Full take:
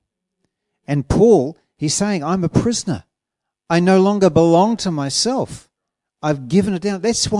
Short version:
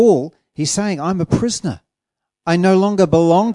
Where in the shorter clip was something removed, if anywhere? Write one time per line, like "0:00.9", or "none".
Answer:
none